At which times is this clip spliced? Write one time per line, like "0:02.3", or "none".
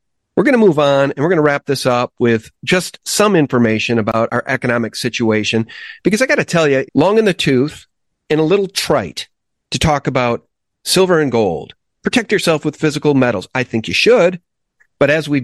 0:06.9